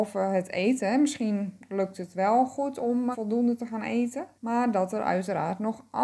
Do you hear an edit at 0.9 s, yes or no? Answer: no